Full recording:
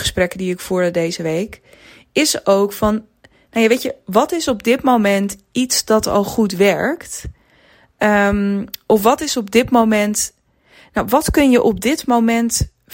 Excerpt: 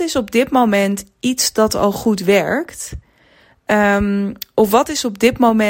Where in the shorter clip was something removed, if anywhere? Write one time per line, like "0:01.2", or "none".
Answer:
none